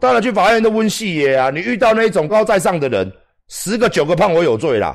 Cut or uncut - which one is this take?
cut